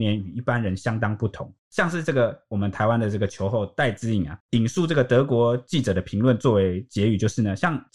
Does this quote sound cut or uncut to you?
cut